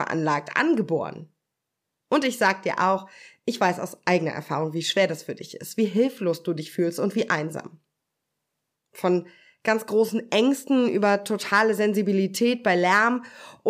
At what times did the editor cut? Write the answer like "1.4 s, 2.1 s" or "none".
8.7 s